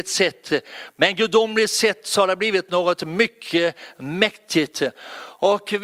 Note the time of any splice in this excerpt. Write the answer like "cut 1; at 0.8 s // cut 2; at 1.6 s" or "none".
none